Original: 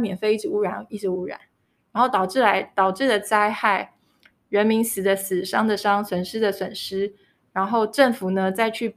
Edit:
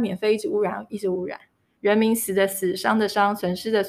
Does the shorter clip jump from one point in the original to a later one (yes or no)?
yes